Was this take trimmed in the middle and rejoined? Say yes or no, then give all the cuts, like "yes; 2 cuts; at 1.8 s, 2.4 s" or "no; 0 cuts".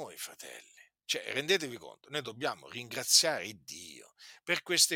yes; 1 cut; at 1.0 s